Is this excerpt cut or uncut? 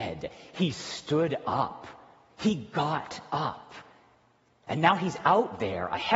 uncut